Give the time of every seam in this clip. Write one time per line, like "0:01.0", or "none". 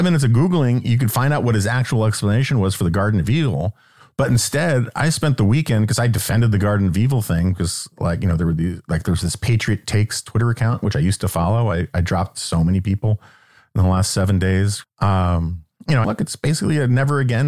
0:14.8
0:16.0